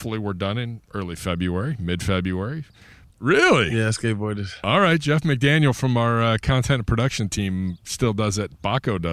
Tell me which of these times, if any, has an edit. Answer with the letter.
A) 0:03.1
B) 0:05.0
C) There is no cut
A